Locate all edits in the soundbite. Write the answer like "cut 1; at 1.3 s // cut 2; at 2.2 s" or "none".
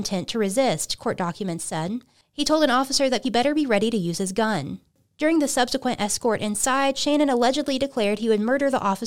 cut 1; at 3.2 s